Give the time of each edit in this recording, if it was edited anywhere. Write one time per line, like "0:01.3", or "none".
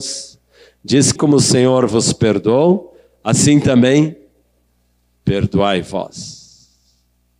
0:01.2